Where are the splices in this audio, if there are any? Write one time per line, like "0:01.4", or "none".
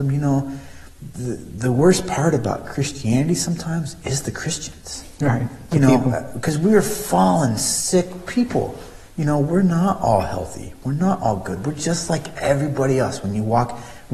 none